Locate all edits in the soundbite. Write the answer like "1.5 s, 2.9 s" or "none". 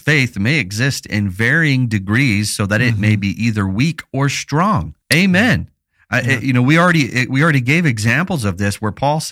5.0 s